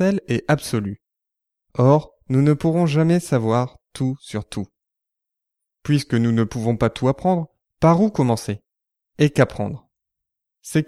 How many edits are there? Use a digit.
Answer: 0